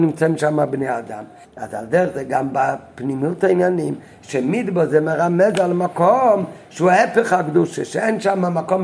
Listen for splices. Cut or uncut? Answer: cut